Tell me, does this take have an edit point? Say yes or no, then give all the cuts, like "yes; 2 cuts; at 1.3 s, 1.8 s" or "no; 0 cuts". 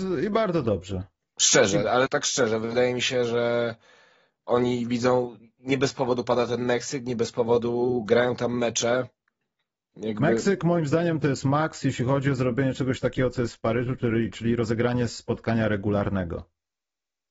yes; 1 cut; at 2.1 s